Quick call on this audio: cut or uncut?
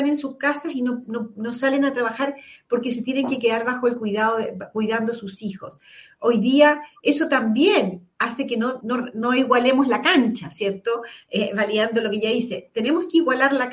cut